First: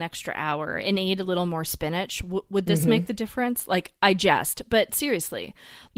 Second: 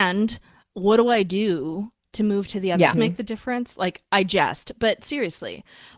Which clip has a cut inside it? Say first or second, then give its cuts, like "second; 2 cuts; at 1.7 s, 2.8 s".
second; 1 cut; at 2.9 s